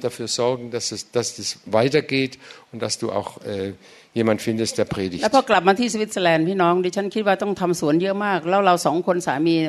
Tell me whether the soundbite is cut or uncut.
uncut